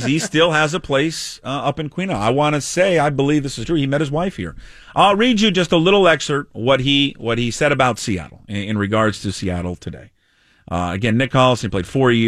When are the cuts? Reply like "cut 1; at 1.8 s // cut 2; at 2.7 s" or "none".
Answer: none